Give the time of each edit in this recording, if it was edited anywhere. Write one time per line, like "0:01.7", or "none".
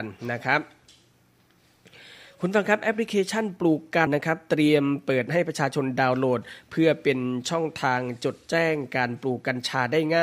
0:04.1